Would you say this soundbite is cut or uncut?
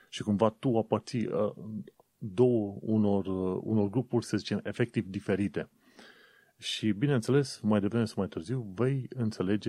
uncut